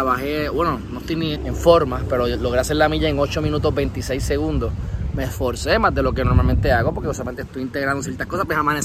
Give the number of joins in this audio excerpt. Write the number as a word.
two